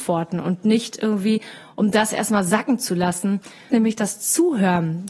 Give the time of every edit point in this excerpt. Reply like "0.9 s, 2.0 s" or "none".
3.7 s